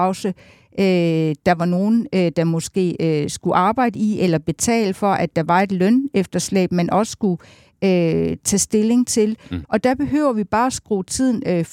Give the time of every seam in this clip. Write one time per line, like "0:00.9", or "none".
0:09.6